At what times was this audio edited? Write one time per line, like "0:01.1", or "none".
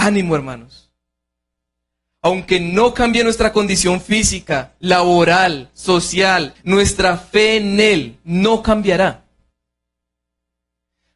0:06.6